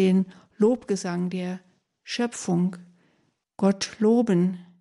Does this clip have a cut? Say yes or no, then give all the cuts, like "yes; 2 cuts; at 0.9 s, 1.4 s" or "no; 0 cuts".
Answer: yes; 1 cut; at 3.4 s